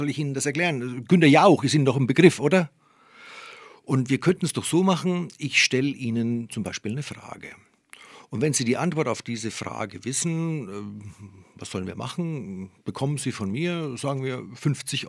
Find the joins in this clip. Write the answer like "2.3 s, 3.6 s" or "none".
none